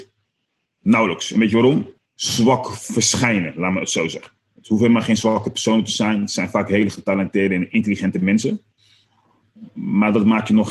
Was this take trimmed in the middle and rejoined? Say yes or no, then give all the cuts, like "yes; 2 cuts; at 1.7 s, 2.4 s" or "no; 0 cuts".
yes; 1 cut; at 2.0 s